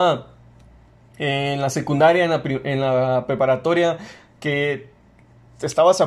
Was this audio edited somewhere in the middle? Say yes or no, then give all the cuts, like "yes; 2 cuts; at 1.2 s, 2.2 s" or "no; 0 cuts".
no; 0 cuts